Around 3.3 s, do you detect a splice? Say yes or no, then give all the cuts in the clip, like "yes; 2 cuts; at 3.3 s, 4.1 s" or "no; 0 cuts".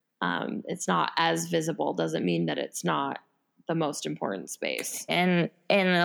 no; 1 cut; at 5.1 s